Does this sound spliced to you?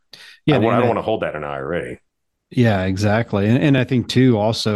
no; 0 cuts

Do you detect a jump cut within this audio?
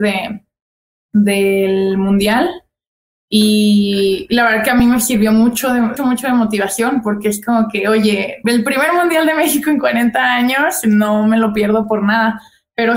yes; 2 cuts; at 6.0 s, 8.4 s

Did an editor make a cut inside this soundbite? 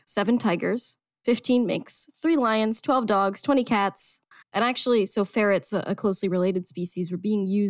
yes; 1 cut; at 4.4 s

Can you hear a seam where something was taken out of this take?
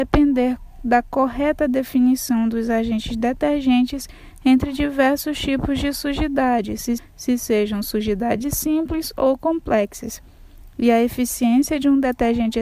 yes; 1 cut; at 7.0 s

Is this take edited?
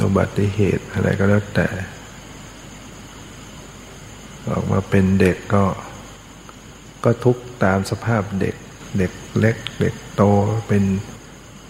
no; 0 cuts

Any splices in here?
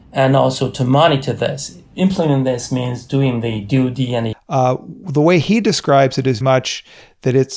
yes; 2 cuts; at 4.3 s, 6.4 s

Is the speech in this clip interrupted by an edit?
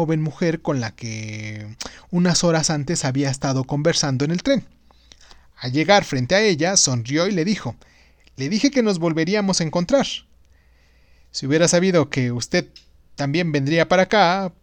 no; 0 cuts

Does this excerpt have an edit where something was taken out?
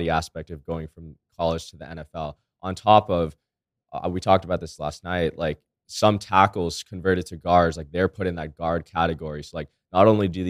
no; 0 cuts

